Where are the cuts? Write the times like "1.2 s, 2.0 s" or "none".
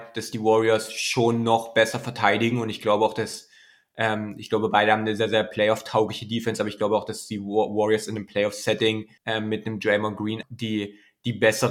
9.2 s, 10.4 s